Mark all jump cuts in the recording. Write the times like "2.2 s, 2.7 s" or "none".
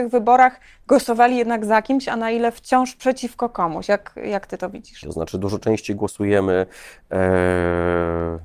5.0 s